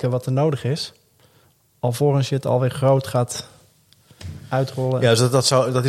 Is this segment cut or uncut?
uncut